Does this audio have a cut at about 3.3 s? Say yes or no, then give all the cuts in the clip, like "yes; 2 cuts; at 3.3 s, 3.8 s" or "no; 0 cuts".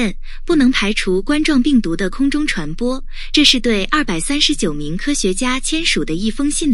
no; 0 cuts